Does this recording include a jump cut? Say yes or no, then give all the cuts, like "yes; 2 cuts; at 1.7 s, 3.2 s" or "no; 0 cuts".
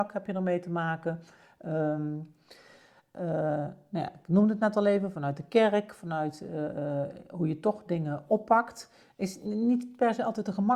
no; 0 cuts